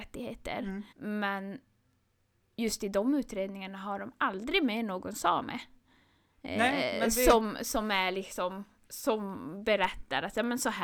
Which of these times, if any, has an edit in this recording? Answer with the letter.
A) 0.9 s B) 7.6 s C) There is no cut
A